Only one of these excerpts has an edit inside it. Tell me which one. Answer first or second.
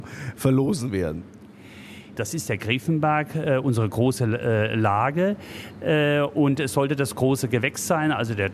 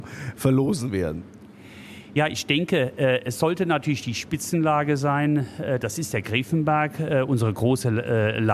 first